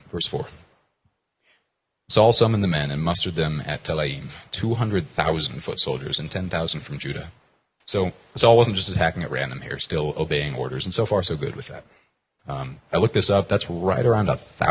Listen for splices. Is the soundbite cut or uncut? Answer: cut